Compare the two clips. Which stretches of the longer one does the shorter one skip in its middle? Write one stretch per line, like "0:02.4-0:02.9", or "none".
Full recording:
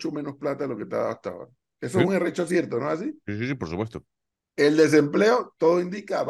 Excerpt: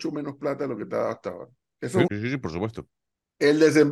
0:02.1-0:03.2